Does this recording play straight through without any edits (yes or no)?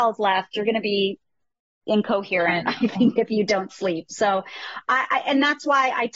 yes